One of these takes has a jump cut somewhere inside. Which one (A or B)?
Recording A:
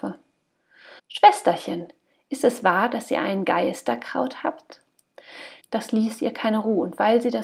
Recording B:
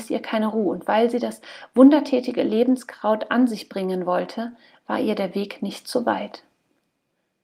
A